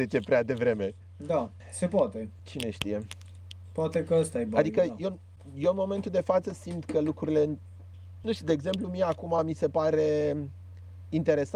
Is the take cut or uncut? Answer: uncut